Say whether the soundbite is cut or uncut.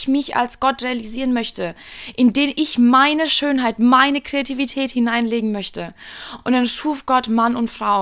uncut